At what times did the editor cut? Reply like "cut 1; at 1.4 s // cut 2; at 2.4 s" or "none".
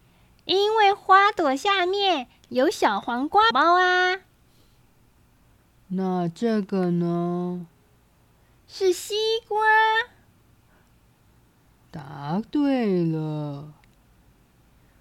cut 1; at 3.5 s